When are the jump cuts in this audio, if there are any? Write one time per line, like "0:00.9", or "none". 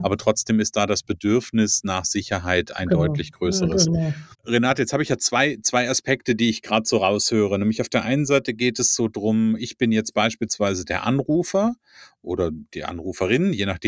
0:04.3